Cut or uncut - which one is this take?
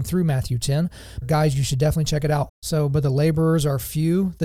cut